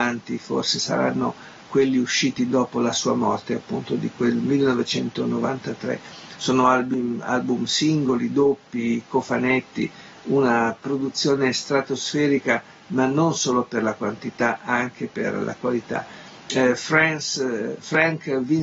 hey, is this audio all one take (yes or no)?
yes